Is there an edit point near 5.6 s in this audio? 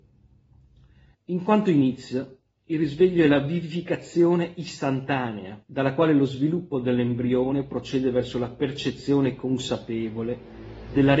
yes; 2 cuts; at 1.1 s, 5.6 s

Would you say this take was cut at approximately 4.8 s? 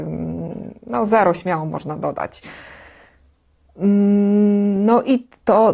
no; 0 cuts

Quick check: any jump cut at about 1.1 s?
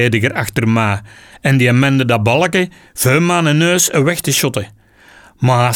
no; 0 cuts

